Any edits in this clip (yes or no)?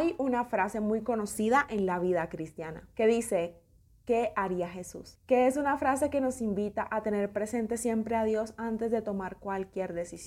no